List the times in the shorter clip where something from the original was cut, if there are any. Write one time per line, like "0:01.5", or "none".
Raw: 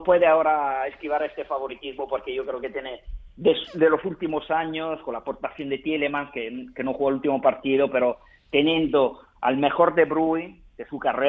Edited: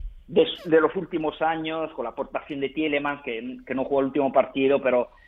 none